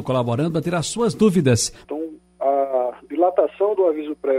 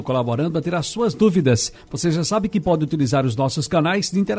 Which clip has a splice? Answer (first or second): first